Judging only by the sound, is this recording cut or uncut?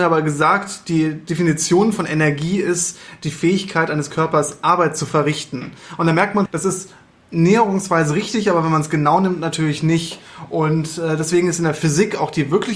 cut